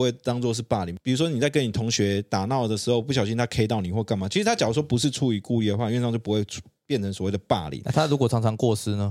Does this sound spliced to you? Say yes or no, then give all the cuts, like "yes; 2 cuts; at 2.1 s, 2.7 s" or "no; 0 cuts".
no; 0 cuts